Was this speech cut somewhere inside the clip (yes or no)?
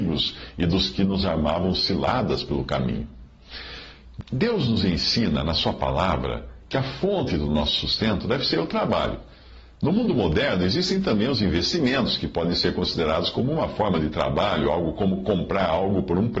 no